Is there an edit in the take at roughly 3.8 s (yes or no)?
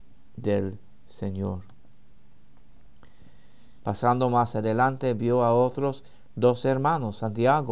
yes